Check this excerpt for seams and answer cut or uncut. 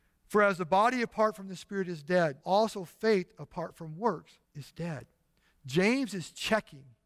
cut